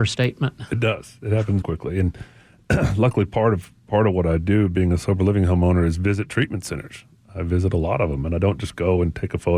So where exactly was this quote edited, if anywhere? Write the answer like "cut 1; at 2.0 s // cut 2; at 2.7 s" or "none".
cut 1; at 1.6 s